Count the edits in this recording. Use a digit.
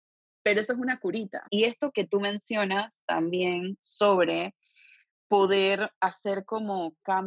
1